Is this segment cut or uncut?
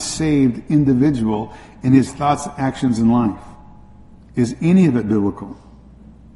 cut